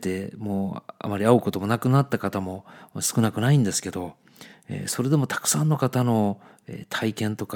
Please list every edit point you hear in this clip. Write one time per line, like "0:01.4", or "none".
none